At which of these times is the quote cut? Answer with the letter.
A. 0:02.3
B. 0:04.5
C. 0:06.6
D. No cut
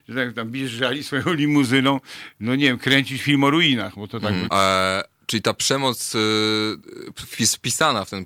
B